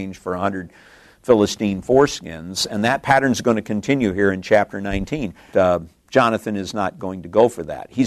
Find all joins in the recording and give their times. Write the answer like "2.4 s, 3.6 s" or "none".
5.5 s